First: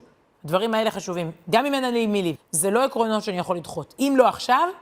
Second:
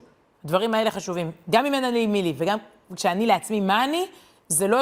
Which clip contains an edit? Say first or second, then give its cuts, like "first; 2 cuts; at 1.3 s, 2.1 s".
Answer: first; 1 cut; at 2.4 s